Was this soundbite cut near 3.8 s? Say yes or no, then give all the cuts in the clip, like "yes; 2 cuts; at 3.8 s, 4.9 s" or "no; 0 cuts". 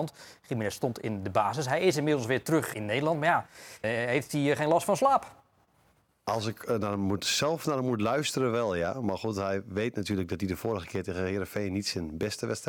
yes; 2 cuts; at 2.7 s, 3.8 s